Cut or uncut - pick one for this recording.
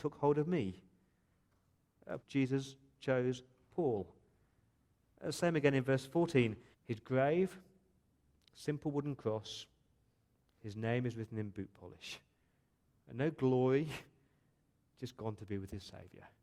cut